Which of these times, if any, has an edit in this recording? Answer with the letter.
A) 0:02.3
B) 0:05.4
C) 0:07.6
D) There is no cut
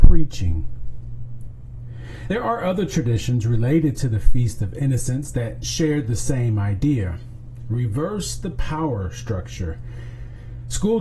D